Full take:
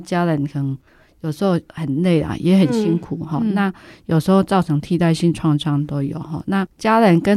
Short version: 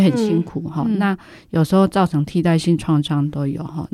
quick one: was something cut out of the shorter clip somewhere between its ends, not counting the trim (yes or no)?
no